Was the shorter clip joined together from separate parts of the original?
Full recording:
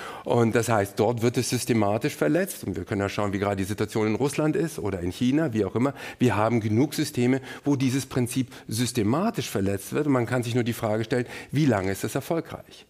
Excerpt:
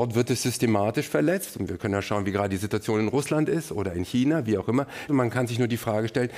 yes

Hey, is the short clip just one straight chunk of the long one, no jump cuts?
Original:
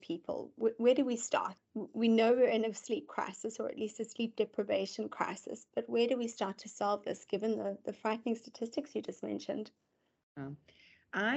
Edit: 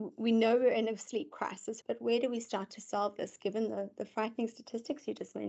no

